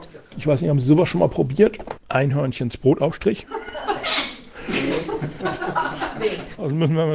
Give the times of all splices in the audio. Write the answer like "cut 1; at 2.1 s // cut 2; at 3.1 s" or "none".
none